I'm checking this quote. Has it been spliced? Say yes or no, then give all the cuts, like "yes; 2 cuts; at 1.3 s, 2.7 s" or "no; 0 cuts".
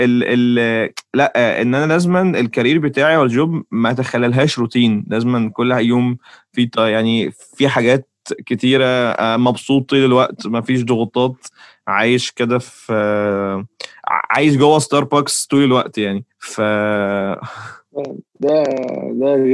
yes; 1 cut; at 16.3 s